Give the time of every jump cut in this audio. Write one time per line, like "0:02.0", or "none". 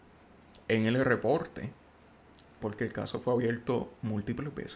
0:02.6